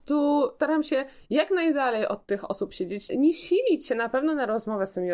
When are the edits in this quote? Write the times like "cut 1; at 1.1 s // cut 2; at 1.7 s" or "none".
cut 1; at 3.1 s